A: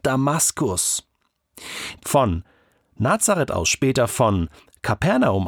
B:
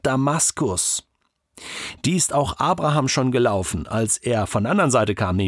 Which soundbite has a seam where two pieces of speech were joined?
A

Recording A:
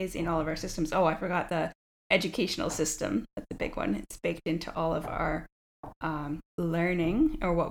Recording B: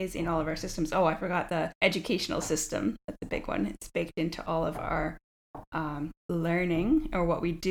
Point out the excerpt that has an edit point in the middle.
B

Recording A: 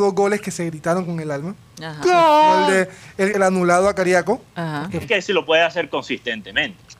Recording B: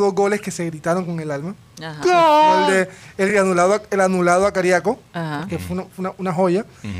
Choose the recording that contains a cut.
A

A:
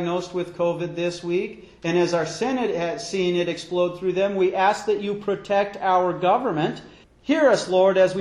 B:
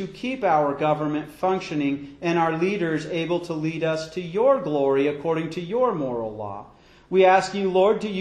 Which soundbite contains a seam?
A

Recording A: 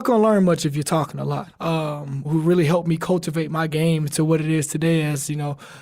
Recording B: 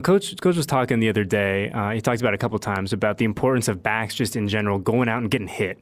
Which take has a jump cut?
A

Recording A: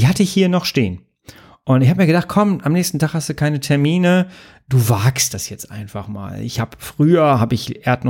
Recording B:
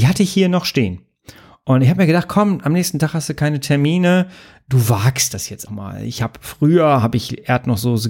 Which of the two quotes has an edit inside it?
B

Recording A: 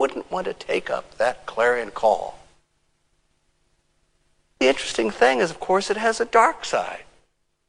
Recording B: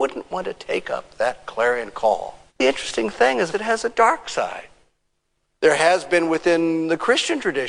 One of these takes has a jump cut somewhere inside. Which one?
B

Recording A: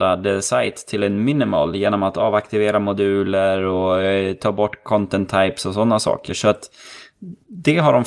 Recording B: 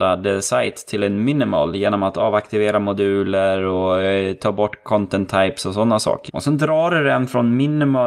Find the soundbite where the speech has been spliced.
B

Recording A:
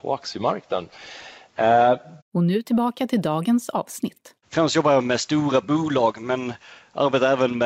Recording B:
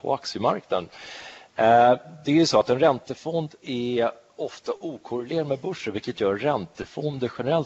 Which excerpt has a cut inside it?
A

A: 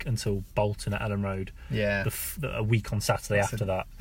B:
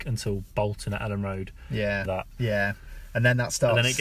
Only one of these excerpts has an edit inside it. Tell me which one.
B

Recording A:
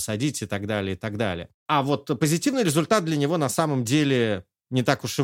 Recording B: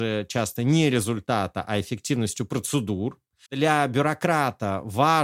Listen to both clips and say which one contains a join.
B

